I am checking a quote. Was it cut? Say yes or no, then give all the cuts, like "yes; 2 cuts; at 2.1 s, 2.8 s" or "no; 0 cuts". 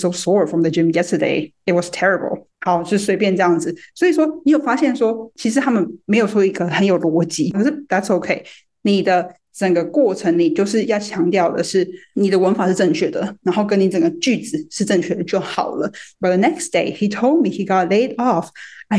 yes; 2 cuts; at 7.5 s, 16.1 s